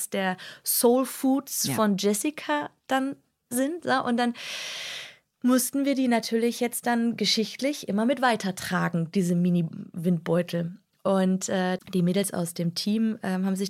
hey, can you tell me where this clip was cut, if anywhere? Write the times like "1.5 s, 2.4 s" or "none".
11.8 s